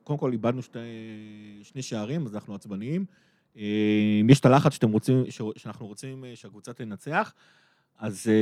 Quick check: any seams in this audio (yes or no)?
no